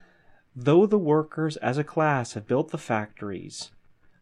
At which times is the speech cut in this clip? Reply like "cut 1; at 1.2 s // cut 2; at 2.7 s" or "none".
none